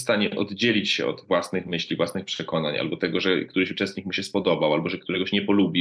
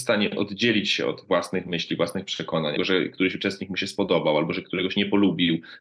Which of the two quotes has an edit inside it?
second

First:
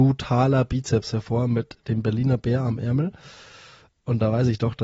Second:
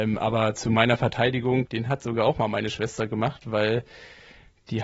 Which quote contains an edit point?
second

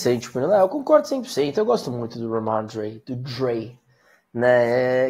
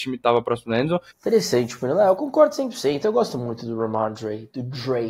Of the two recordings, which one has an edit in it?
second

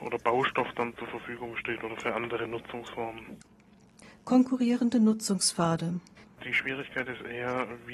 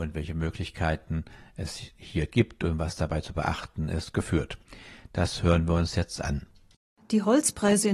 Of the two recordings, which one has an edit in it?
first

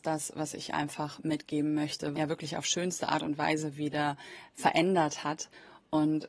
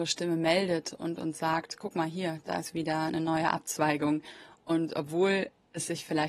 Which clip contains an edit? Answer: first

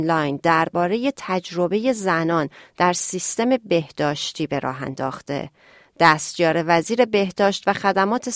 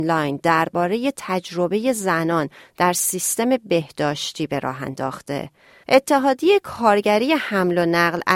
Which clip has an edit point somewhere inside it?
second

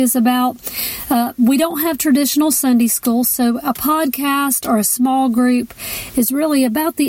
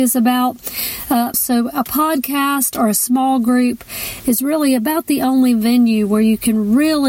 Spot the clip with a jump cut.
second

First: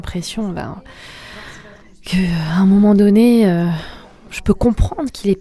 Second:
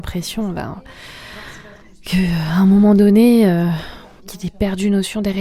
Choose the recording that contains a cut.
second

